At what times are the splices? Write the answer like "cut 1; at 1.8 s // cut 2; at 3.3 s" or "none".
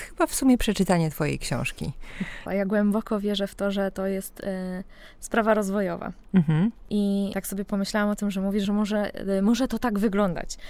cut 1; at 2.5 s // cut 2; at 8.6 s